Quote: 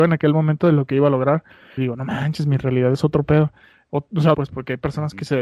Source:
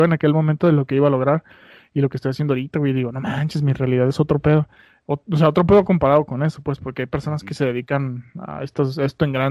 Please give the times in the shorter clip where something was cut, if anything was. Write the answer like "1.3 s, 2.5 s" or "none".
1.8 s, 4.3 s